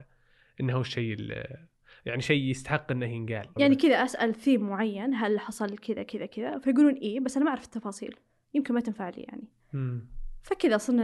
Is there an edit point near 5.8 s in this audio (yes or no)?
no